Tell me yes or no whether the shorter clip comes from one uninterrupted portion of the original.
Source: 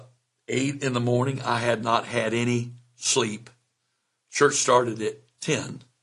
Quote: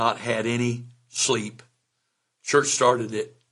yes